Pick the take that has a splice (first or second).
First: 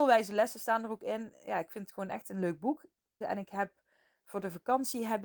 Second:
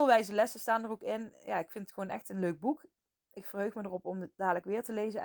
first